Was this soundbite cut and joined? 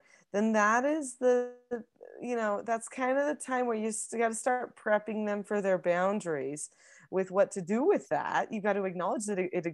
no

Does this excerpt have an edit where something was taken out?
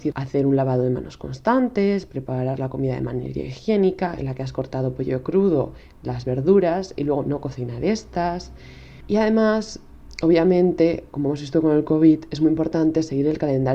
yes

